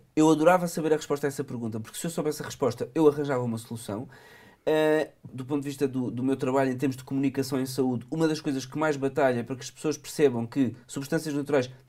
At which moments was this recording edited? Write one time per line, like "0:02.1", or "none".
0:05.3